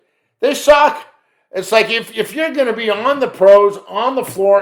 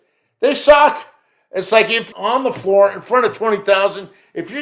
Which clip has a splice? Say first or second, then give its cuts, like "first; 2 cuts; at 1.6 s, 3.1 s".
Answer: second; 1 cut; at 2.1 s